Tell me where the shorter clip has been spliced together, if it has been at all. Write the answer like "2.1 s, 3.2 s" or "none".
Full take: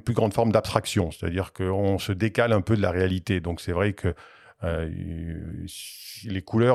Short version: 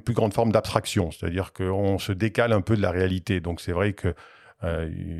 none